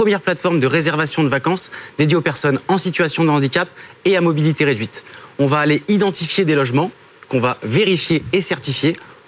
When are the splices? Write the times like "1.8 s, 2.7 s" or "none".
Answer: none